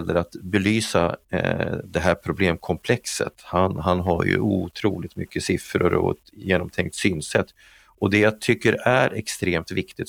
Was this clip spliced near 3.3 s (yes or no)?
no